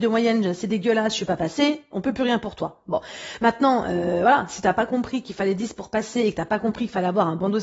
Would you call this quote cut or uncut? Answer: uncut